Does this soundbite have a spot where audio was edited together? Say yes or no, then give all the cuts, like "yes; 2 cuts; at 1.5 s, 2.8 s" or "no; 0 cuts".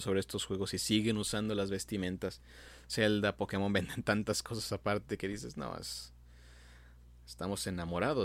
no; 0 cuts